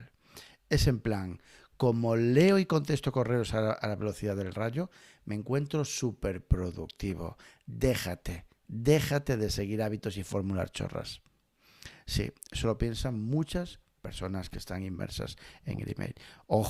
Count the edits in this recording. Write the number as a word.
zero